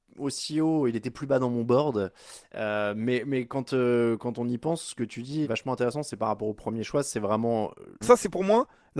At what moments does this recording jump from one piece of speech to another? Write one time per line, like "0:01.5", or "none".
0:05.4
0:08.0